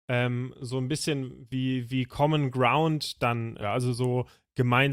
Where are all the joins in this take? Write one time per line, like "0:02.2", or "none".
0:03.6